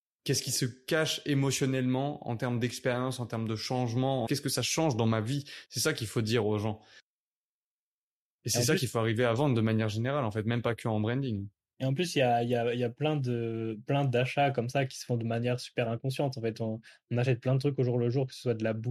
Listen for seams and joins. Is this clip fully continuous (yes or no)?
no